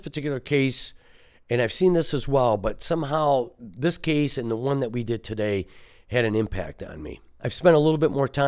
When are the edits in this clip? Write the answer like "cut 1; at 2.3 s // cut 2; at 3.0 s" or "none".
none